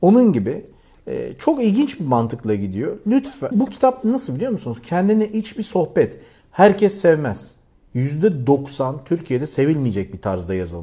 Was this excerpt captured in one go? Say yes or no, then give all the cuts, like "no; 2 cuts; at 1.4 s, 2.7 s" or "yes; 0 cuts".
no; 1 cut; at 3.5 s